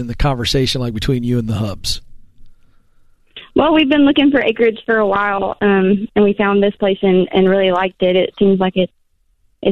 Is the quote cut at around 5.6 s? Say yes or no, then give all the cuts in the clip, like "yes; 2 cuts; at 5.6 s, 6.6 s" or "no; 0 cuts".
no; 0 cuts